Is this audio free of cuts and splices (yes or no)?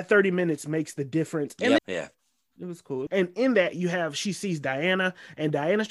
no